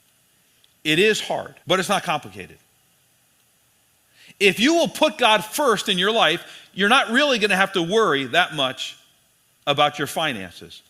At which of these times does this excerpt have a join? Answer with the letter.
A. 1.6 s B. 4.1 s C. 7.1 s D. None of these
A